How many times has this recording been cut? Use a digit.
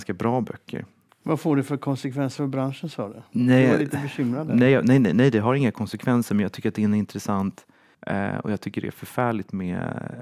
2